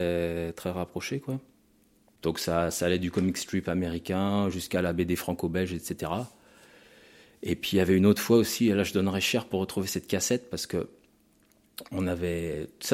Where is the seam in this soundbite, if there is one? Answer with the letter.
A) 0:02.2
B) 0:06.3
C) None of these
A